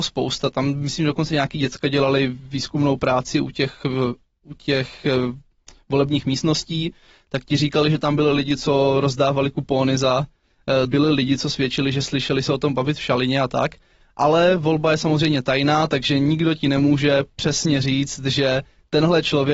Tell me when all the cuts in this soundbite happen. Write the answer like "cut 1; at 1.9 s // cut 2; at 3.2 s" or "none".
cut 1; at 10.8 s